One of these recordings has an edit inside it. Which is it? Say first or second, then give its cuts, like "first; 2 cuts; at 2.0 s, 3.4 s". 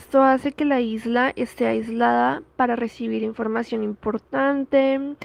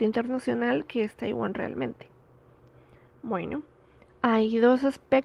second; 1 cut; at 4.1 s